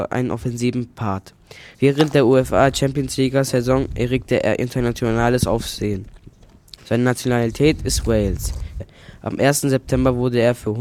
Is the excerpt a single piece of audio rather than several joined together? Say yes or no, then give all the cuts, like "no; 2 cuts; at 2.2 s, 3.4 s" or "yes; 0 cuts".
no; 3 cuts; at 1.7 s, 6.8 s, 8.8 s